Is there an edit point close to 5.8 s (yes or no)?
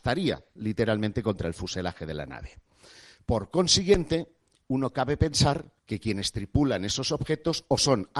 yes